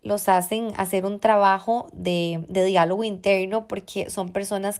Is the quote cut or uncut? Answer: uncut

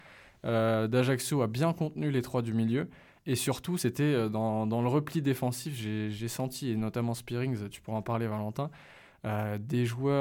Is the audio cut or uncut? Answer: uncut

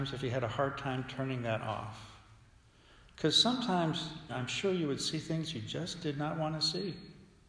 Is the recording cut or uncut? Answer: cut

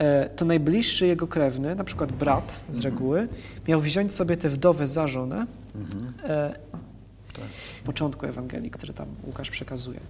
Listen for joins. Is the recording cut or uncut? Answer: cut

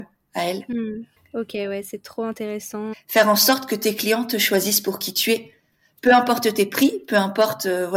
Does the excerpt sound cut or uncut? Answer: cut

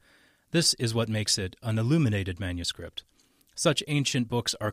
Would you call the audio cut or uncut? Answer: uncut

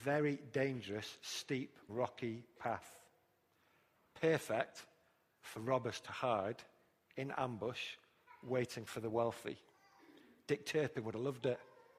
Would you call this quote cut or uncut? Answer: cut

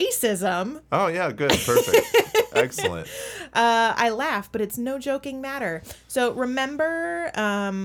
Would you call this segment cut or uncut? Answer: uncut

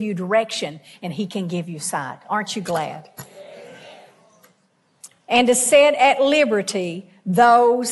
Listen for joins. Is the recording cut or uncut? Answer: uncut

